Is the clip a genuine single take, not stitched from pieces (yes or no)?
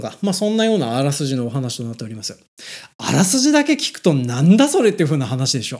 yes